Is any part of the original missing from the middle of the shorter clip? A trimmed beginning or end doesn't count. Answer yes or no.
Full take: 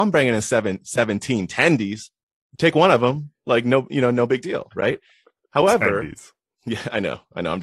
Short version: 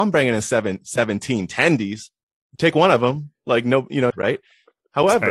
yes